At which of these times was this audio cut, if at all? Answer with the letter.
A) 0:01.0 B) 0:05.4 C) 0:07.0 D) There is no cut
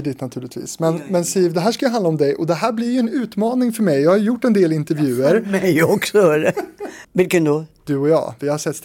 C